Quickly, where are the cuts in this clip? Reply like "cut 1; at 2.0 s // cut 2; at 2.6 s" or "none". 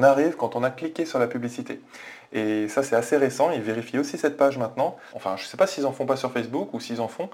cut 1; at 5.1 s